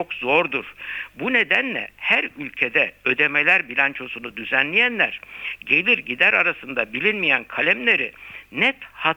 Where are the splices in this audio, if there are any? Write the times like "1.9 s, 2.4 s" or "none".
none